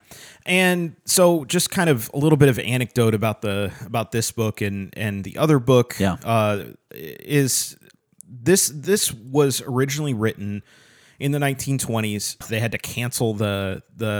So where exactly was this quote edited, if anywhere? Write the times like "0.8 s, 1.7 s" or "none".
12.4 s